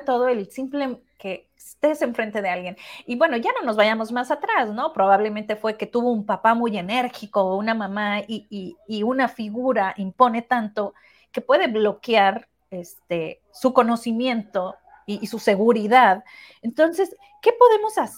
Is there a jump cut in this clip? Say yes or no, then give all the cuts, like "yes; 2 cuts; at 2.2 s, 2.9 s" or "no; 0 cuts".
no; 0 cuts